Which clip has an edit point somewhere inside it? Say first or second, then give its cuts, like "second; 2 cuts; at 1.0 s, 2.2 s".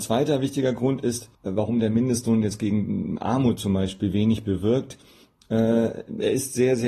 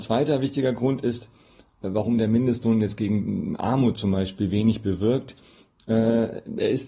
first; 1 cut; at 1.3 s